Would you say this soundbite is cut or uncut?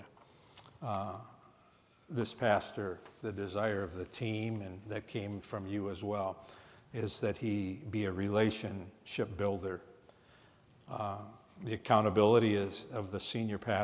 uncut